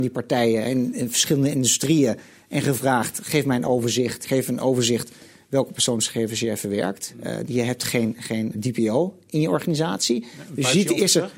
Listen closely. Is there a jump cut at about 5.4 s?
no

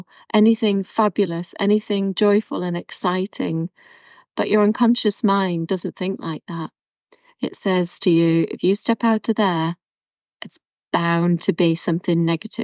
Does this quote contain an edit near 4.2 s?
no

